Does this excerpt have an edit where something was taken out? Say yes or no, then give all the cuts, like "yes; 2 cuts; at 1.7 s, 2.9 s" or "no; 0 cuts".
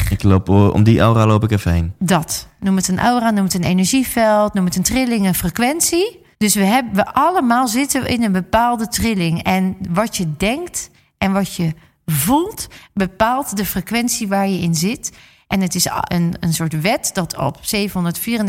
yes; 2 cuts; at 6.3 s, 16.1 s